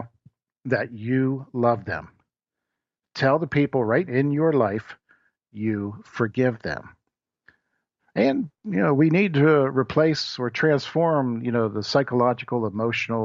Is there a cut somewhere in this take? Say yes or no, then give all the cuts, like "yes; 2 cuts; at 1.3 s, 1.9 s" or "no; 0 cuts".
yes; 2 cuts; at 4.1 s, 8.0 s